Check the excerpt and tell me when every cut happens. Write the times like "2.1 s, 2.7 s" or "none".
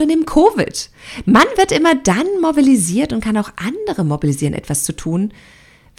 1.2 s